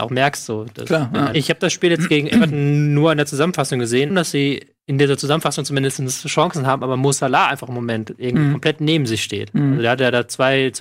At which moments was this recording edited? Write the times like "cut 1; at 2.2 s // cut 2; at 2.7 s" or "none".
cut 1; at 1.3 s // cut 2; at 4.1 s